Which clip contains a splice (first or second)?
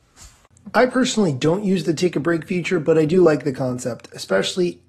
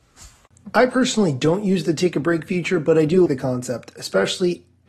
second